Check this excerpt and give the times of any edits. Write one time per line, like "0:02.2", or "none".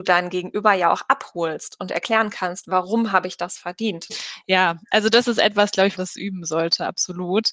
0:04.1
0:05.9